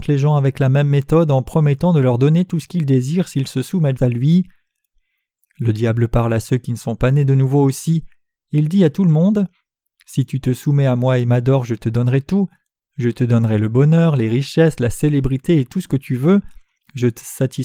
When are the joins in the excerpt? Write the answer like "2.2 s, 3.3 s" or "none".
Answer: 4.0 s